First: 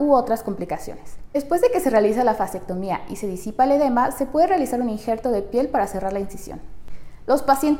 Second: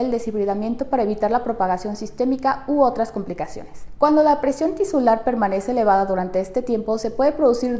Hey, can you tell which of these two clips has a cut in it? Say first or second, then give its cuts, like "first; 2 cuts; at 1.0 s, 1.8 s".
second; 1 cut; at 4.0 s